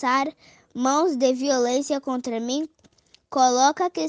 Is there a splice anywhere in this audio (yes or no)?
no